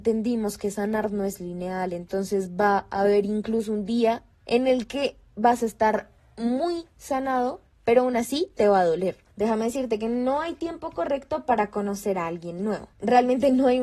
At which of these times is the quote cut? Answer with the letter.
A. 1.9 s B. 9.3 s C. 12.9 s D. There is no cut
B